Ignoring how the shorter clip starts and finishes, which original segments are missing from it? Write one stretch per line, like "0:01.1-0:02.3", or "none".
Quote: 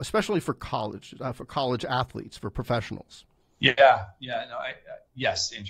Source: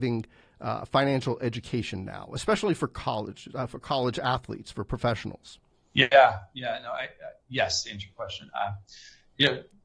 none